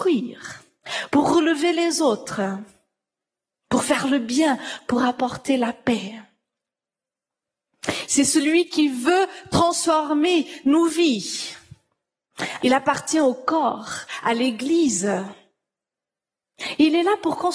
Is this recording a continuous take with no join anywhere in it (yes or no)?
no